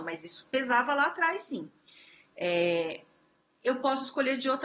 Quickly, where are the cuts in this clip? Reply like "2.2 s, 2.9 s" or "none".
none